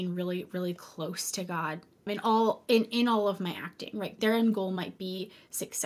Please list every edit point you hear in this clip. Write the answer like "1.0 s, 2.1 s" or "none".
2.1 s, 4.2 s